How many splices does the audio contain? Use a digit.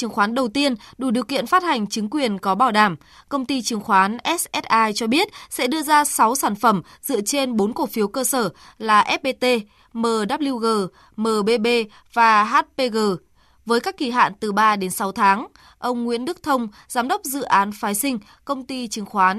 0